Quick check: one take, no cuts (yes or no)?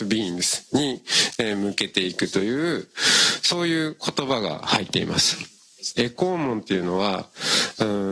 no